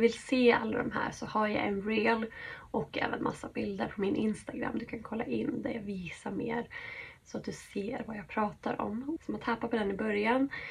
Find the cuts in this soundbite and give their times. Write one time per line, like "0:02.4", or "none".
0:09.2